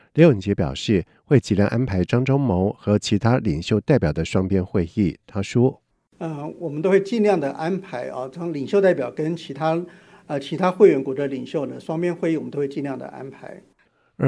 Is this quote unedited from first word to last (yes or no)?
yes